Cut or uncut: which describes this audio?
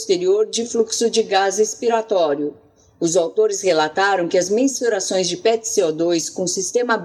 uncut